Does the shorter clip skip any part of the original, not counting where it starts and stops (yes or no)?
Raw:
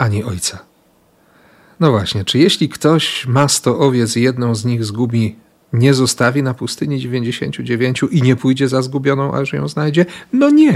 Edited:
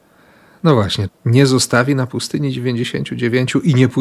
yes